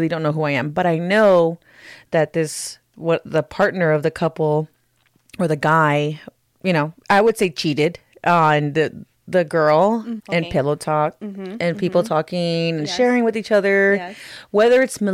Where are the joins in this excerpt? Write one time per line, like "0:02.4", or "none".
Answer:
0:06.4
0:10.2